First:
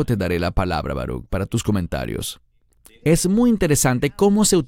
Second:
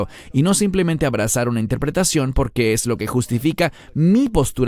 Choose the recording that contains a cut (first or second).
first